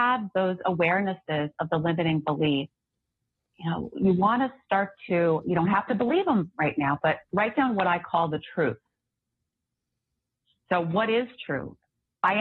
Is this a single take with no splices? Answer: yes; 0 cuts

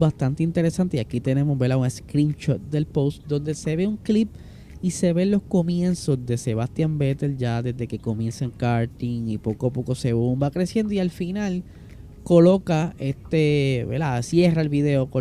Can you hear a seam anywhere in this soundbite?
no; 0 cuts

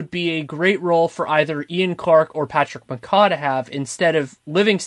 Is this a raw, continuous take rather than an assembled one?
yes; 0 cuts

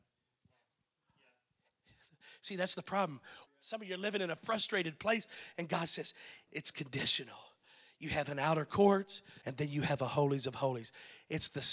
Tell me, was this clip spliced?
yes; 3 cuts; at 3.5 s, 6.5 s, 9.4 s

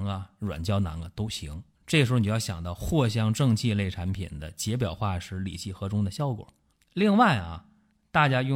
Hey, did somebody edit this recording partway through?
yes; 2 cuts; at 1.7 s, 6.7 s

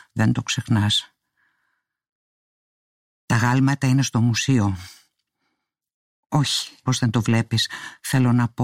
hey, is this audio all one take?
no; 1 cut; at 6.8 s

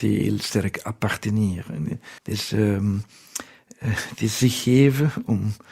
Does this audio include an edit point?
yes; 1 cut; at 2.2 s

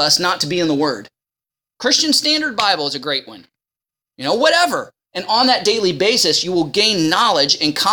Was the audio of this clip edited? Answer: yes; 2 cuts; at 1.6 s, 5.0 s

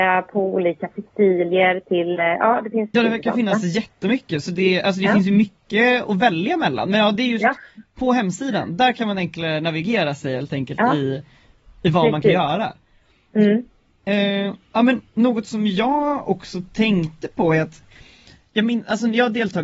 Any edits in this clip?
yes; 1 cut; at 2.9 s

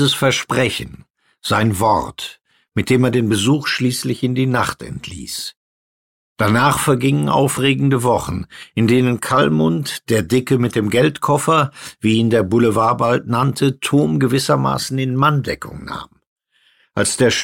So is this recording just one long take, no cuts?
yes; 0 cuts

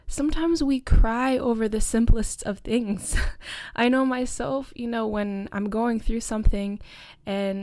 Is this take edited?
no; 0 cuts

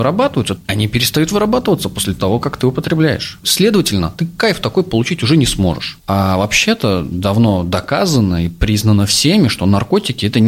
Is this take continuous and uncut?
no; 2 cuts; at 6.0 s, 7.1 s

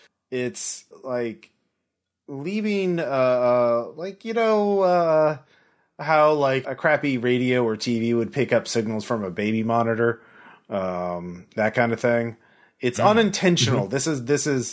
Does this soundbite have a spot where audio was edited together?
yes; 1 cut; at 6.6 s

